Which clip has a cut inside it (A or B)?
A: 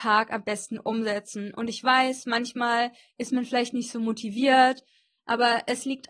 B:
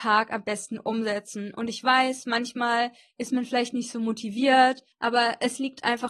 B